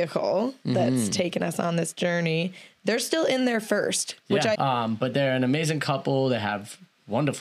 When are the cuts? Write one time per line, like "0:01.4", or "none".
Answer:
0:04.5